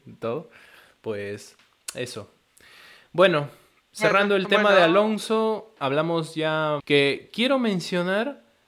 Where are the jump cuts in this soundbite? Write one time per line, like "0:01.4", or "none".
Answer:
0:06.8